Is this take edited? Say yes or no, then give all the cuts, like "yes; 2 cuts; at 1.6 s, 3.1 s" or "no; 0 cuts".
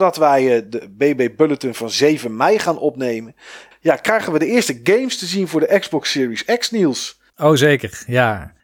yes; 2 cuts; at 3.7 s, 7.3 s